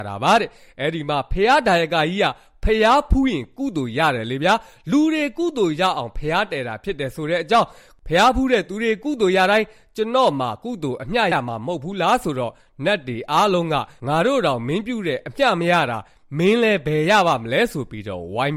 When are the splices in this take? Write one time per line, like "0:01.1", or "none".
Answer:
0:11.3